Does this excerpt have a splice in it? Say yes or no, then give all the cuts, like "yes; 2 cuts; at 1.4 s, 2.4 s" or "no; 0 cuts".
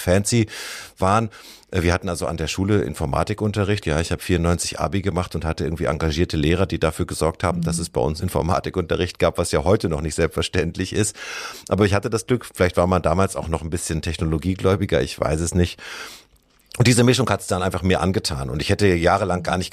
yes; 1 cut; at 3.8 s